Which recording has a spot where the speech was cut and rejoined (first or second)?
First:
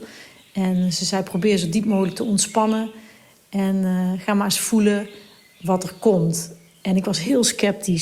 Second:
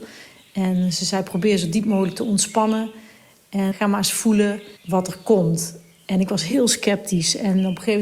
second